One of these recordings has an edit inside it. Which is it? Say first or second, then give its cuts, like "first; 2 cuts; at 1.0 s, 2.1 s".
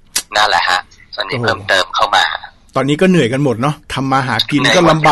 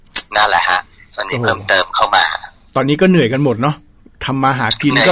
first; 1 cut; at 3.8 s